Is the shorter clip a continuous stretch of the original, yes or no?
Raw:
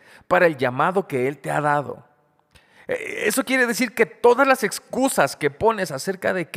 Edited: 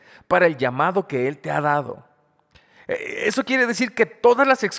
yes